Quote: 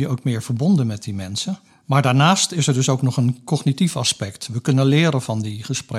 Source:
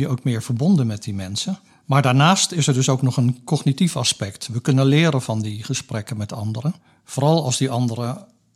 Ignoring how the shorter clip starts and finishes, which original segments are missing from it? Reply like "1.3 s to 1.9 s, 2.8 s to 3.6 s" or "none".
none